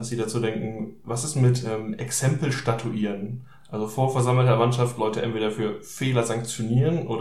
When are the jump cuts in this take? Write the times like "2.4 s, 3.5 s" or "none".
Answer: none